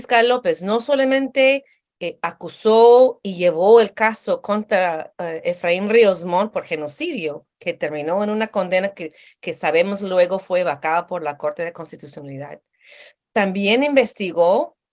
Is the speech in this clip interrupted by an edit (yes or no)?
no